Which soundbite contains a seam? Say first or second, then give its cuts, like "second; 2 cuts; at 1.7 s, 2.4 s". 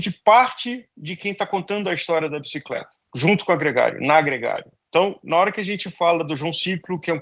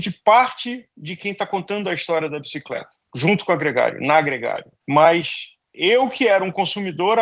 second; 1 cut; at 4.8 s